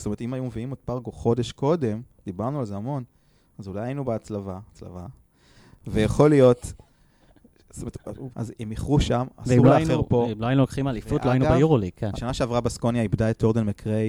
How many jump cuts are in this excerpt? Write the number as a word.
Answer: two